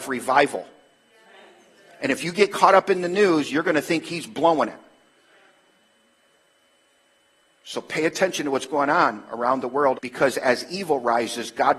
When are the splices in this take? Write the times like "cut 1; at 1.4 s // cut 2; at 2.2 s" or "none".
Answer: cut 1; at 10.0 s